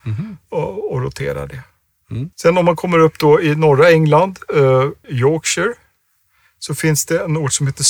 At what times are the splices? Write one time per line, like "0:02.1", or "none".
0:02.3
0:05.0